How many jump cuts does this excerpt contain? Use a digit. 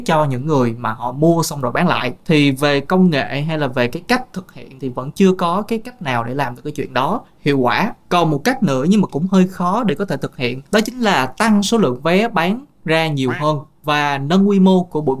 1